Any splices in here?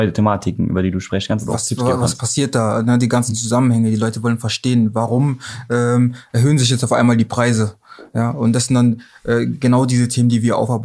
no; 0 cuts

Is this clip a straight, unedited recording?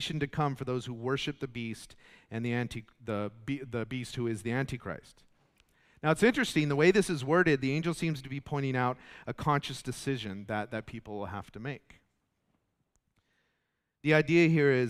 yes; 0 cuts

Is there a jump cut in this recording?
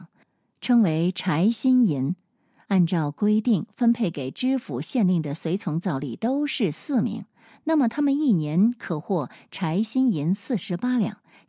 no; 0 cuts

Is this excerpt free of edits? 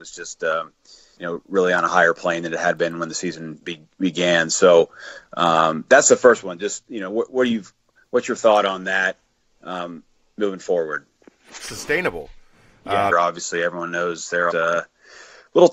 no; 2 cuts; at 13.1 s, 14.5 s

